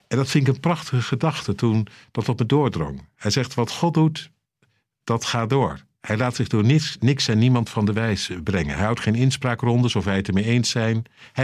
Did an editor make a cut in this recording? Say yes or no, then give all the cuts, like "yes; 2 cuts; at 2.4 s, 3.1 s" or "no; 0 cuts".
no; 0 cuts